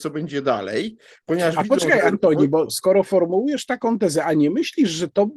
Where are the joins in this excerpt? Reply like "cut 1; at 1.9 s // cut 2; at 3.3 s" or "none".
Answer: cut 1; at 2.7 s